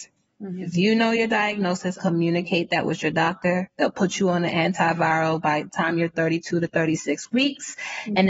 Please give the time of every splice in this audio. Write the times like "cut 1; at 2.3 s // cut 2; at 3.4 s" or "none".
cut 1; at 2.0 s